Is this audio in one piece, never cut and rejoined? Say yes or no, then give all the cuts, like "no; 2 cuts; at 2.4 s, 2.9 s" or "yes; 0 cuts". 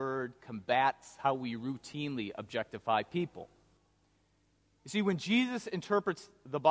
yes; 0 cuts